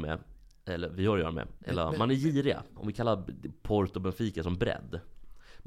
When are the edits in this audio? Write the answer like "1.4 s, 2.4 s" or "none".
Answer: 1.6 s, 2.8 s